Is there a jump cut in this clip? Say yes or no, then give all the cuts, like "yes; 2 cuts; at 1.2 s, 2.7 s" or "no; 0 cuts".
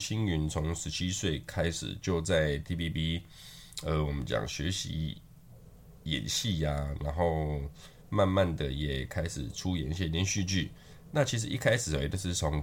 no; 0 cuts